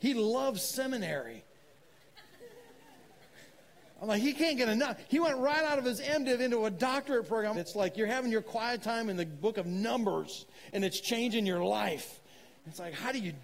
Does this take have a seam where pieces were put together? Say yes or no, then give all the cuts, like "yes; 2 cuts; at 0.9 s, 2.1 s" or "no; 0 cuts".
yes; 1 cut; at 7.5 s